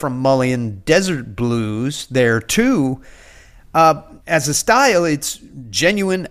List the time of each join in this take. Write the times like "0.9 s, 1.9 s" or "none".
4.2 s